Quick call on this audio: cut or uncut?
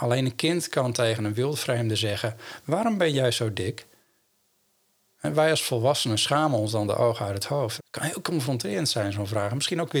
cut